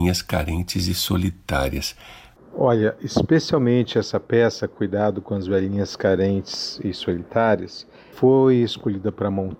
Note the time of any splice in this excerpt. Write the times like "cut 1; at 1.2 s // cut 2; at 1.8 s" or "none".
cut 1; at 2.4 s // cut 2; at 8.1 s

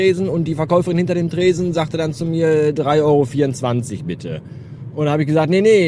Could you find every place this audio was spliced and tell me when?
none

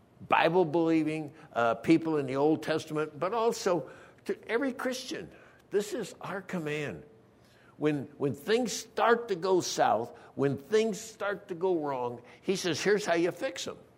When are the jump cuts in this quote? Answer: none

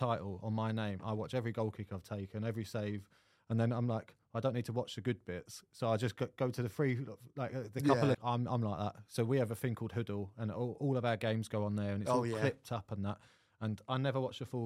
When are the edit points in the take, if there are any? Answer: cut 1; at 8.1 s

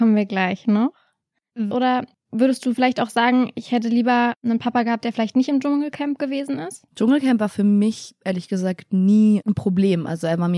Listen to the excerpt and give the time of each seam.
cut 1; at 1.7 s // cut 2; at 6.9 s

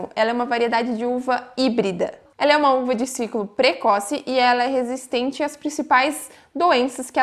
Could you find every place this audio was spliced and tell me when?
cut 1; at 2.3 s

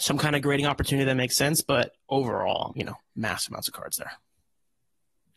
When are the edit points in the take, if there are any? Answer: cut 1; at 2.7 s

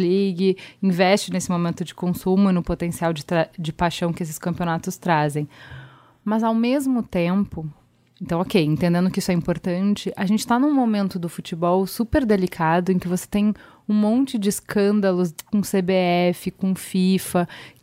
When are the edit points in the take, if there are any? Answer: none

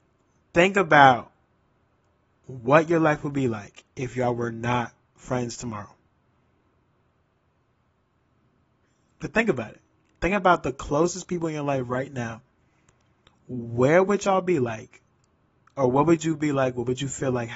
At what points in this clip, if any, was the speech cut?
cut 1; at 8.8 s

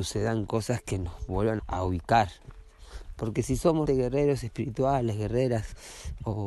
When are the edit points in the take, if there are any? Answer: cut 1; at 1.6 s // cut 2; at 3.9 s

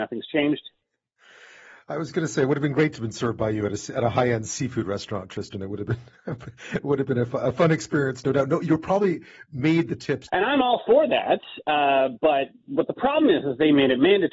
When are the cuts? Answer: cut 1; at 10.3 s

